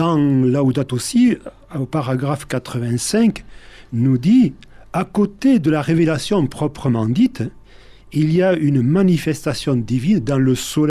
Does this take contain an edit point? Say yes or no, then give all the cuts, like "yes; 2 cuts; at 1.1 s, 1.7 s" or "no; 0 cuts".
no; 0 cuts